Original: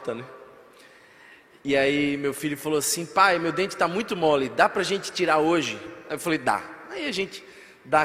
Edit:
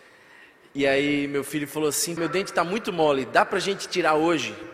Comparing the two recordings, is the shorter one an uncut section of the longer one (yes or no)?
no